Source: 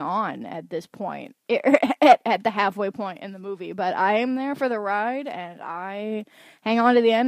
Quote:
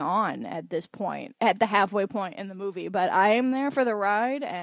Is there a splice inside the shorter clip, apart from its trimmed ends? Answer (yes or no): yes